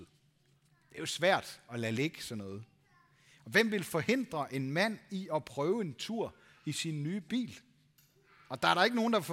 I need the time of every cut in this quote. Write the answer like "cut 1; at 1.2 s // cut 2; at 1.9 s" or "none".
none